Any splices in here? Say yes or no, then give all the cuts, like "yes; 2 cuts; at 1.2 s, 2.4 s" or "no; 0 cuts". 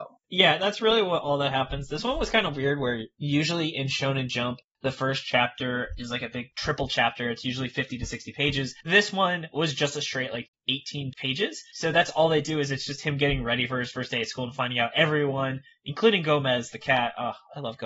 no; 0 cuts